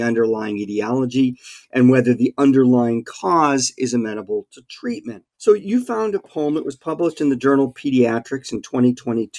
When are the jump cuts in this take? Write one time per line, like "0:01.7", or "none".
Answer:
0:05.3